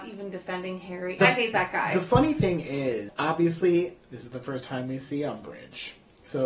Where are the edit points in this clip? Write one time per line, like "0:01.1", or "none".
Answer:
0:01.2